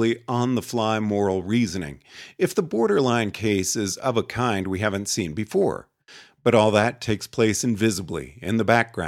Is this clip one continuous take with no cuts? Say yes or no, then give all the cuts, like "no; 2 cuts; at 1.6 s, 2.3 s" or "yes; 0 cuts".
yes; 0 cuts